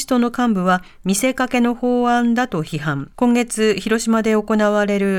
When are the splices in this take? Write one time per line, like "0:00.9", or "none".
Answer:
0:03.1